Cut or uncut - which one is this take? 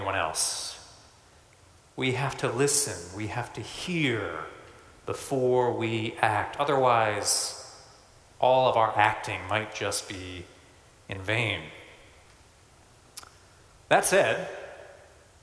uncut